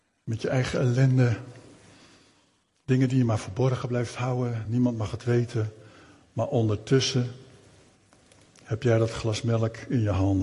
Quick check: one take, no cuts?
yes; 0 cuts

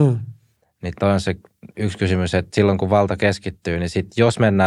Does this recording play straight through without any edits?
yes; 0 cuts

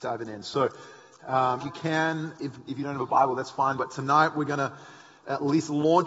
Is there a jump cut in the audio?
yes; 2 cuts; at 1.6 s, 3.8 s

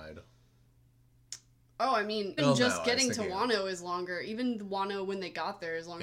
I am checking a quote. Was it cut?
yes; 1 cut; at 2.4 s

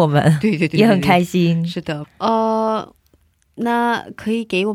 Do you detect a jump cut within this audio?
yes; 1 cut; at 2.0 s

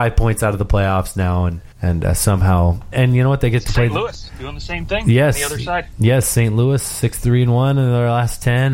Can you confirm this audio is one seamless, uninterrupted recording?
no; 2 cuts; at 1.7 s, 2.9 s

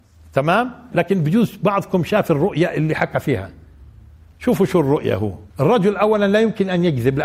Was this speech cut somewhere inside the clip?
yes; 2 cuts; at 0.9 s, 5.5 s

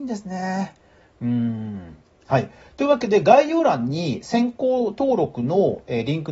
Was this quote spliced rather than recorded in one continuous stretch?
no; 0 cuts

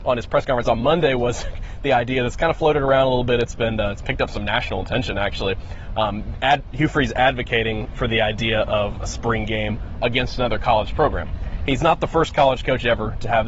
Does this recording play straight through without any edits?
yes; 0 cuts

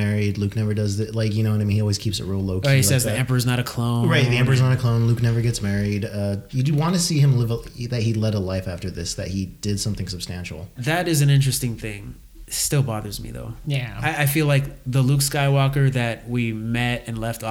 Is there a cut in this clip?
no; 0 cuts

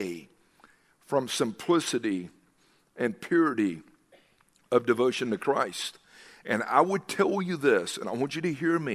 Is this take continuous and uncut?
yes; 0 cuts

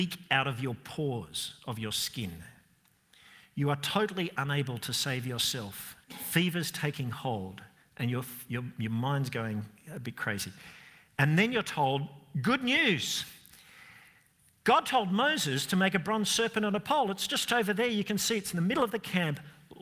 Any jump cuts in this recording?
yes; 1 cut; at 6.0 s

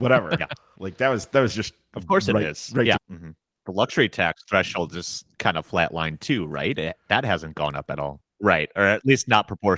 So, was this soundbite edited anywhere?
yes; 2 cuts; at 3.0 s, 8.2 s

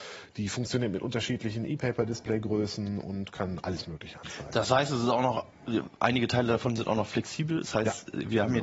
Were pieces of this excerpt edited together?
no; 0 cuts

